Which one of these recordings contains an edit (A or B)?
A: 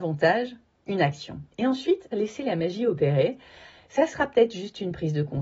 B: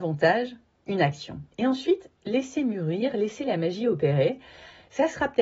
A